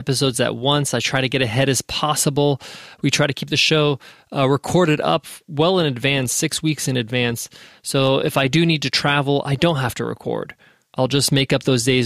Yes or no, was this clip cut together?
no